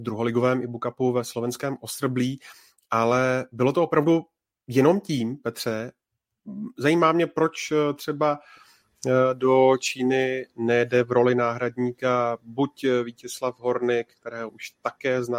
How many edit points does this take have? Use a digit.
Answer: 0